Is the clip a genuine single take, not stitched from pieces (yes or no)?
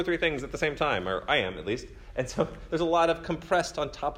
yes